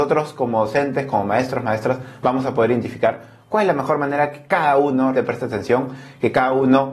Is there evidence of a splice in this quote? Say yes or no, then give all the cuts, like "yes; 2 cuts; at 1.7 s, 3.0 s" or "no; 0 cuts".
yes; 1 cut; at 5.1 s